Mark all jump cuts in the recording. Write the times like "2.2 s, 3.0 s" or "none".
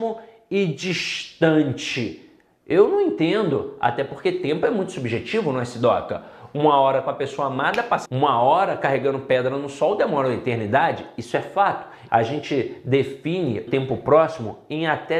8.1 s, 12.1 s, 13.7 s